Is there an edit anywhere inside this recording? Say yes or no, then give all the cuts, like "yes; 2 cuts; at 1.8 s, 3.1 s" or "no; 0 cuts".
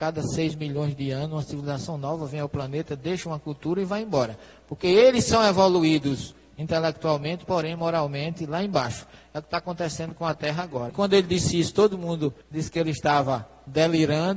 yes; 2 cuts; at 10.9 s, 12.4 s